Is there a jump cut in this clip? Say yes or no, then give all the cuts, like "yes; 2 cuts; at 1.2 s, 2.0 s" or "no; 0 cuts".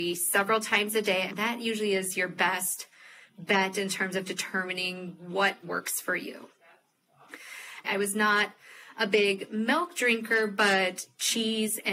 yes; 3 cuts; at 1.3 s, 5.6 s, 7.8 s